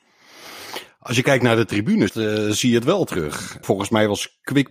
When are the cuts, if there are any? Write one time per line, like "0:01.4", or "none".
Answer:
0:02.1
0:03.6